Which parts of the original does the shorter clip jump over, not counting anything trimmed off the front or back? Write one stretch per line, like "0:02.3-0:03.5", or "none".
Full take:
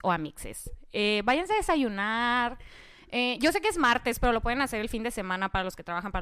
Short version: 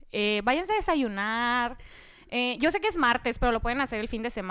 none